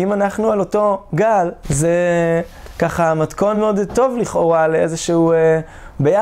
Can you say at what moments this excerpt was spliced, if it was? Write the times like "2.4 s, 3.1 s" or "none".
1.6 s, 3.5 s